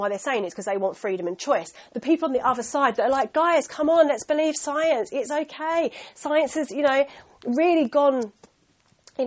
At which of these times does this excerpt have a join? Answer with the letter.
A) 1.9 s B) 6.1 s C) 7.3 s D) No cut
D